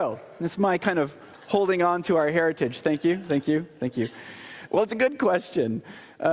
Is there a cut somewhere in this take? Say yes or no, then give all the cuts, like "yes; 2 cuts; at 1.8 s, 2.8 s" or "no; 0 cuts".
yes; 1 cut; at 4.7 s